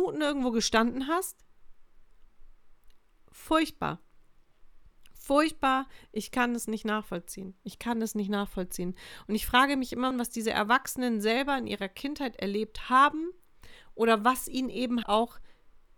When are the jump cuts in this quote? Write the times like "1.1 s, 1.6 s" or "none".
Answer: 10.1 s, 15.0 s